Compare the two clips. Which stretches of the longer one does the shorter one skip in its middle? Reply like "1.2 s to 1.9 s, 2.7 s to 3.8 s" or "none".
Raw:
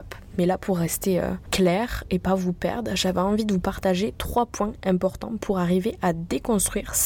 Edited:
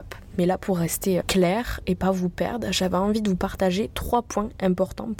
1.2 s to 1.4 s